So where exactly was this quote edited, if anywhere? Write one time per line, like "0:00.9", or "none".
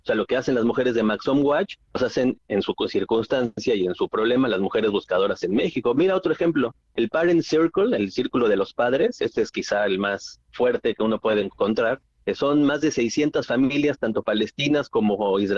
none